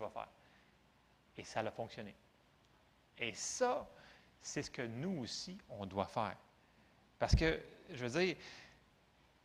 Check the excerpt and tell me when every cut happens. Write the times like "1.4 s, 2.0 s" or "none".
none